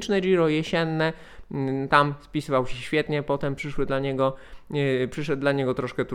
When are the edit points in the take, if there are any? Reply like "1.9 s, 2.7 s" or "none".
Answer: none